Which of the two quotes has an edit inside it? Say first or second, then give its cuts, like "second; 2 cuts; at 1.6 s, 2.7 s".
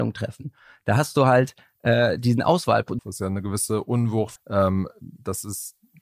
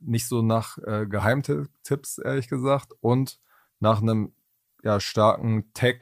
first; 2 cuts; at 3.0 s, 4.4 s